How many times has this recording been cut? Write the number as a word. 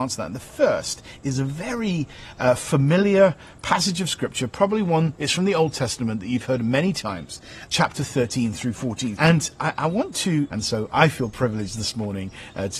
three